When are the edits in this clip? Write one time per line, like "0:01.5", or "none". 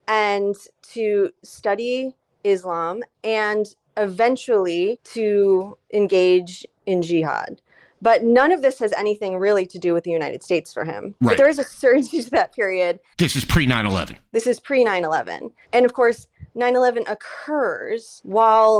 0:11.2
0:13.1